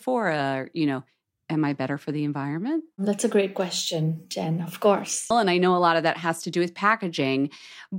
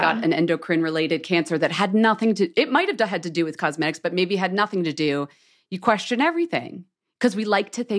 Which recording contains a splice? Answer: first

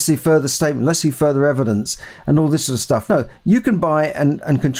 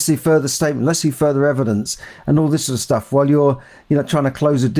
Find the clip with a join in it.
first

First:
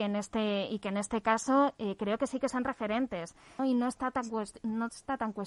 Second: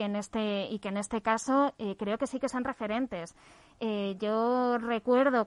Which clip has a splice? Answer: first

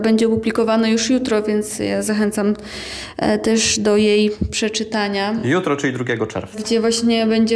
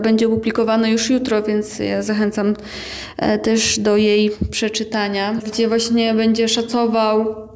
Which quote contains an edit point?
second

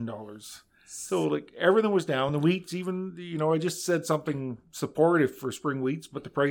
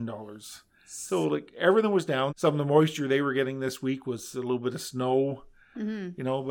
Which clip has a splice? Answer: second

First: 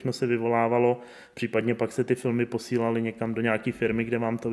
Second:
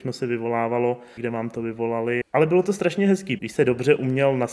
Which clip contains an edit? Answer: second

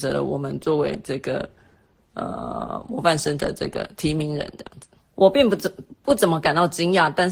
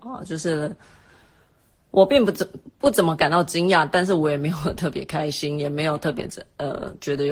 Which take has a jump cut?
first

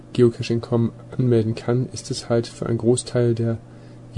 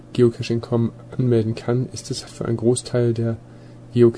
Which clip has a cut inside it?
second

